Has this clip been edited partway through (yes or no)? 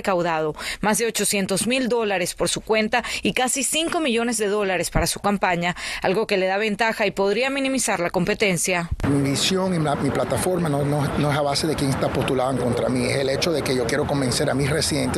no